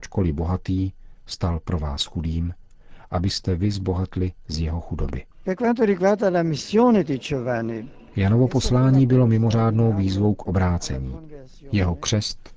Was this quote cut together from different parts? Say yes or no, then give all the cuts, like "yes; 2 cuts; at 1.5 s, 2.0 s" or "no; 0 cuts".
no; 0 cuts